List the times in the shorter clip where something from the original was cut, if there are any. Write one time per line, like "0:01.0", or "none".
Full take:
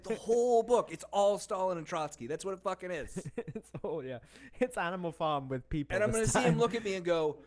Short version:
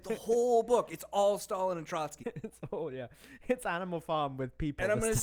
0:02.2